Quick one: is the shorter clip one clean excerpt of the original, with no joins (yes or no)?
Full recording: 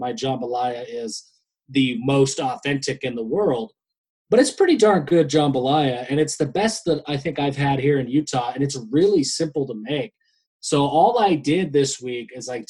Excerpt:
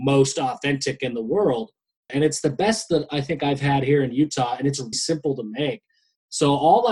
no